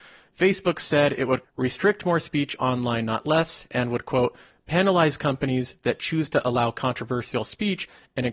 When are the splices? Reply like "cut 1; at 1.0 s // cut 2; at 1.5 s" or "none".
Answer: cut 1; at 1.4 s